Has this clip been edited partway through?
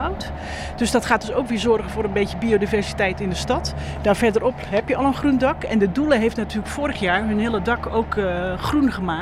no; 0 cuts

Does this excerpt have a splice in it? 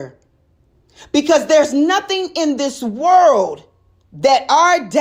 no; 0 cuts

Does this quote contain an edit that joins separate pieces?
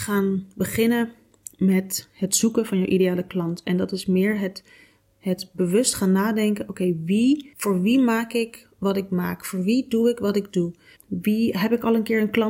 yes; 1 cut; at 11.0 s

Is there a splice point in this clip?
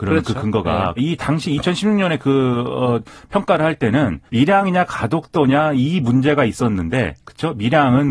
yes; 2 cuts; at 1.0 s, 4.3 s

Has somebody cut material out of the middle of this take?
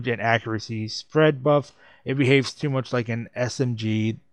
no; 0 cuts

